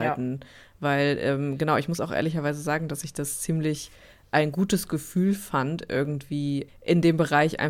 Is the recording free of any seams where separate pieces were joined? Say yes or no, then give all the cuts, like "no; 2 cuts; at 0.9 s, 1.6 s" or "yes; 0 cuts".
no; 1 cut; at 6.7 s